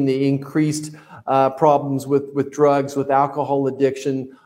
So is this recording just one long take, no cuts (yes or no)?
yes